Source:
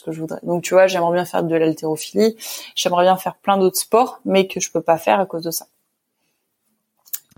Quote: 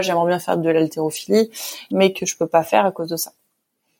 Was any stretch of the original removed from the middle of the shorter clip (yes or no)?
yes